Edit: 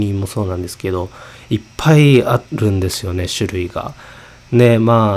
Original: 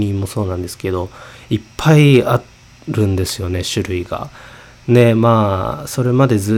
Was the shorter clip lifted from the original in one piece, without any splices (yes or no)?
no